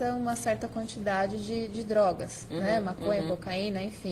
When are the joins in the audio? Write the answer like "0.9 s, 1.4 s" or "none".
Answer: none